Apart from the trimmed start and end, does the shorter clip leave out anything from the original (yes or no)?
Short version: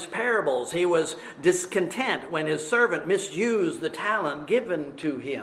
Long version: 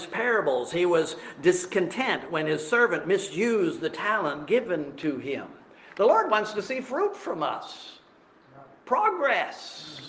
no